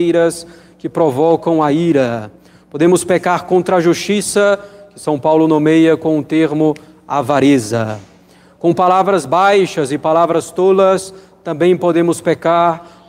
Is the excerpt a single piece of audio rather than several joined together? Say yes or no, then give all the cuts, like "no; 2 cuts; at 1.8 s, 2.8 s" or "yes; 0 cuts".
yes; 0 cuts